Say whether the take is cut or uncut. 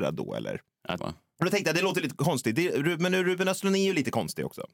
cut